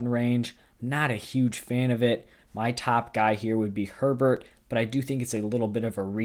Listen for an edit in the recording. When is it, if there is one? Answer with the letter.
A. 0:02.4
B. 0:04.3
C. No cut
A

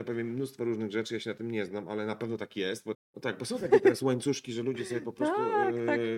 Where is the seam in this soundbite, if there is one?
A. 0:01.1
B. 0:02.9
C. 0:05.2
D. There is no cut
B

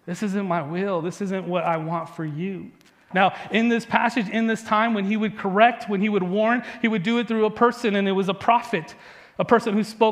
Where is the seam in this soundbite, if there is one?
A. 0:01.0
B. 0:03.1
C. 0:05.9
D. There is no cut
B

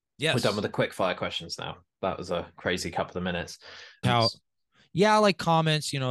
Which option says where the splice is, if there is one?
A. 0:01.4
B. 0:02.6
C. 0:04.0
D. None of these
C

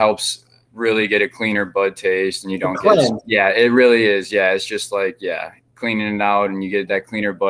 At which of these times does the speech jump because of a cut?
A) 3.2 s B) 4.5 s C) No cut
A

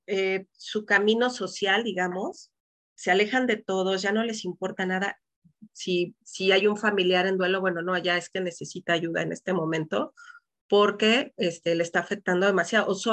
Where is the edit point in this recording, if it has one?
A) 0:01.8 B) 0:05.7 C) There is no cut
B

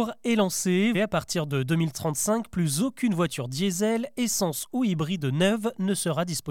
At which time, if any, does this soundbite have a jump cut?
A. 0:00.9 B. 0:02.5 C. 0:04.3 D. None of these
A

